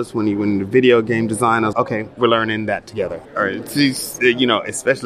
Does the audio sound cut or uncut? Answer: cut